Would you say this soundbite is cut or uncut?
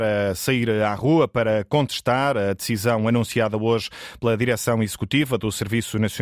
uncut